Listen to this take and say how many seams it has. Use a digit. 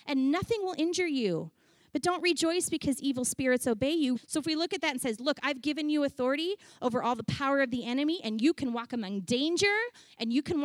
1